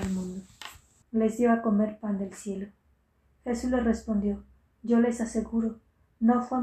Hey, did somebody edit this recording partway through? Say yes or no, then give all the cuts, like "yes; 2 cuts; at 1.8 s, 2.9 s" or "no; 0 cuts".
yes; 1 cut; at 1.0 s